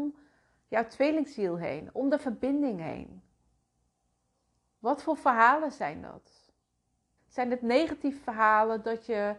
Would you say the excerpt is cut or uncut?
cut